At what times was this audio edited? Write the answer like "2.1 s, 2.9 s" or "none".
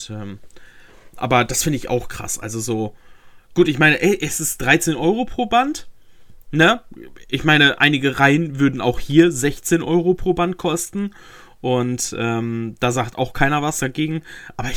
1.1 s